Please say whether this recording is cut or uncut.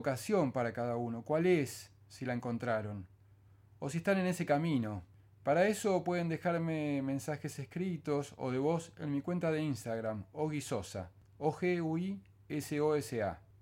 uncut